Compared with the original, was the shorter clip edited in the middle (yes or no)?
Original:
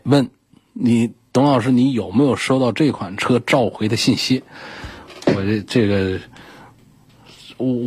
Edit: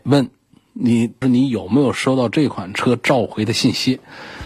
yes